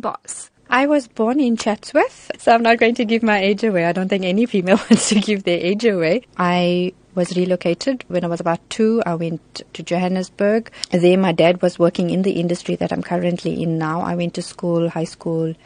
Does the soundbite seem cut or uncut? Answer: uncut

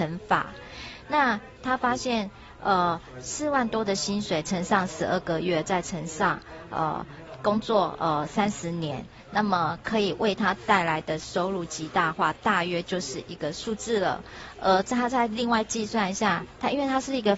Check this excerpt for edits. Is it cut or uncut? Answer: uncut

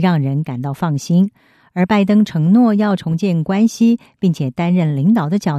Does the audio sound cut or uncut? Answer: uncut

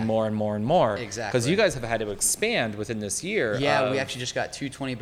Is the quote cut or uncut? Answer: uncut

